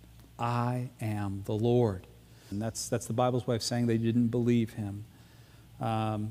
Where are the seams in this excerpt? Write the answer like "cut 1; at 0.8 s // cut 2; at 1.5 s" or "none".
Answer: cut 1; at 2.5 s

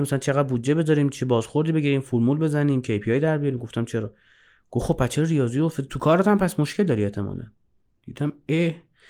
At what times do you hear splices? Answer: none

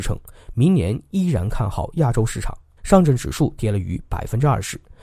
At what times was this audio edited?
cut 1; at 2.8 s

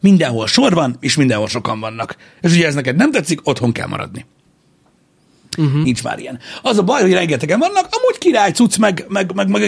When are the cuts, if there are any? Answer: none

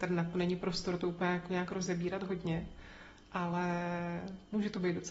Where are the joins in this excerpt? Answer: none

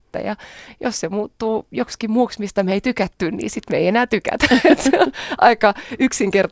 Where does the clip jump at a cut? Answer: none

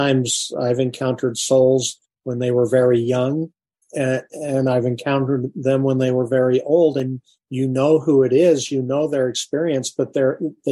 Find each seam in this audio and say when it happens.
cut 1; at 3.8 s

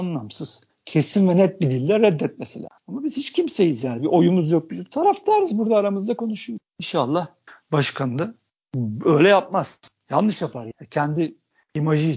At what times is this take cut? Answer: cut 1; at 2.8 s

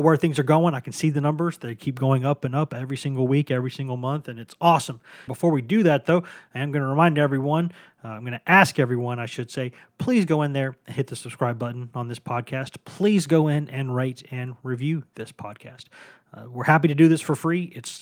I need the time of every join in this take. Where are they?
cut 1; at 5.3 s

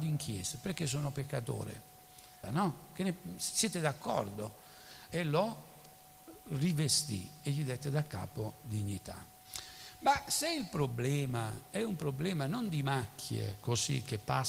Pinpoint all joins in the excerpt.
cut 1; at 2.4 s // cut 2; at 5.1 s

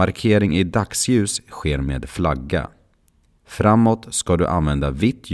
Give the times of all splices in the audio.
cut 1; at 3.3 s

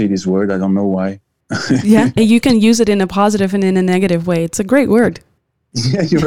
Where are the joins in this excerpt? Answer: cut 1; at 2.2 s

